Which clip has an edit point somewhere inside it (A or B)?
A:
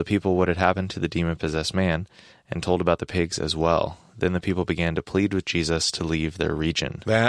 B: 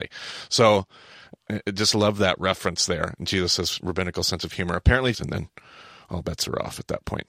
B